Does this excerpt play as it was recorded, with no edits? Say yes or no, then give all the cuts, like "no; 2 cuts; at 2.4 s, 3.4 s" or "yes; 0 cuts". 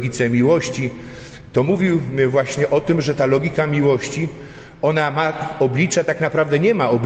yes; 0 cuts